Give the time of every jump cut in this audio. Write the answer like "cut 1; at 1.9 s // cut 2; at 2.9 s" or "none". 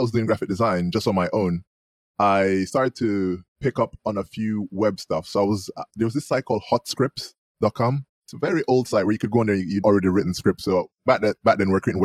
cut 1; at 3.5 s // cut 2; at 9.8 s